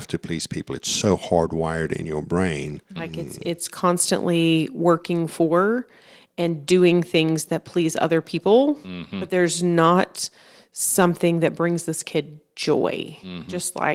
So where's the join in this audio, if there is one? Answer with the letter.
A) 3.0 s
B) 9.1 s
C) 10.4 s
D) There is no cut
A